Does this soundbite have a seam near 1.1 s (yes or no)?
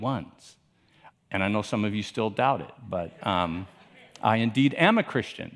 yes